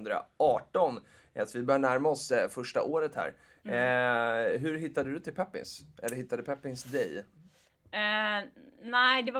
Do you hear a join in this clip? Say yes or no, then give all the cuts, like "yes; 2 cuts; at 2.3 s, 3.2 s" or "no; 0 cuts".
no; 0 cuts